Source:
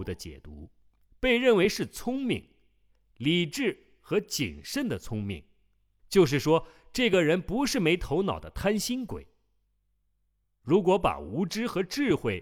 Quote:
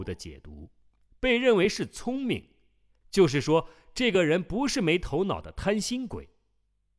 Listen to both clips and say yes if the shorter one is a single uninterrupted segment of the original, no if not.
no